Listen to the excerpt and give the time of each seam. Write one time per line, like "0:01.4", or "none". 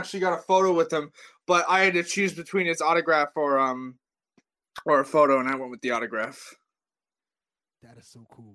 none